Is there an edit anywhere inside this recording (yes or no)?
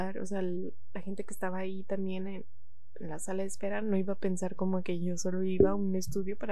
no